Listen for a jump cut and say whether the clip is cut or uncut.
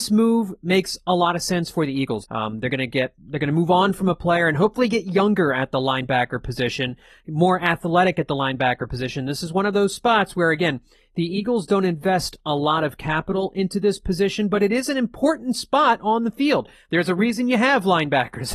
cut